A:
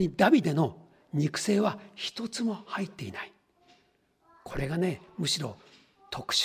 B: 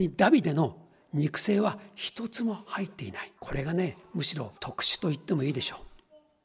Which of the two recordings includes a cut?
B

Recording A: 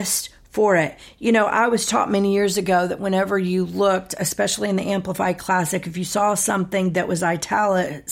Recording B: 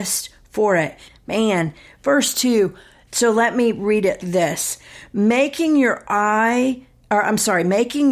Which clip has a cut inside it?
B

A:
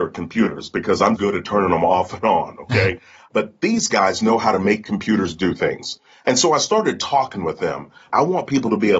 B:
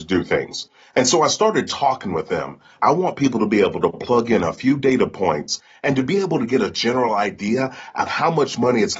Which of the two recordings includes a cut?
A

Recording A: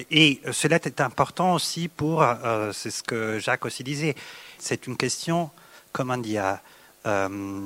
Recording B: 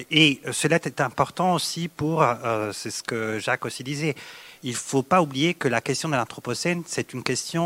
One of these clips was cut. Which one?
A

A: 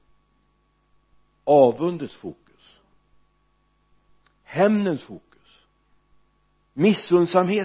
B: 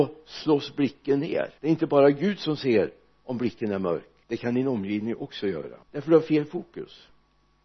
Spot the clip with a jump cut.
B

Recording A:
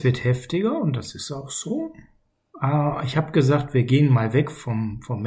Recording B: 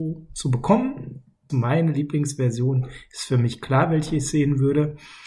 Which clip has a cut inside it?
B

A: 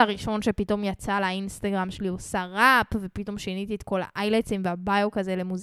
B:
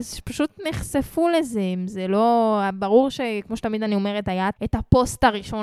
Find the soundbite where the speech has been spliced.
B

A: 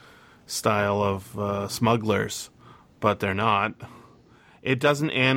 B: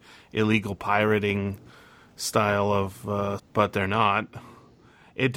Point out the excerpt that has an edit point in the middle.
B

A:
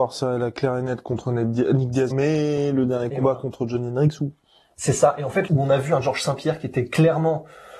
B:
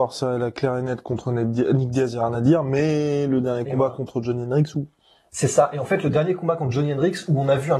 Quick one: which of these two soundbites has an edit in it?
A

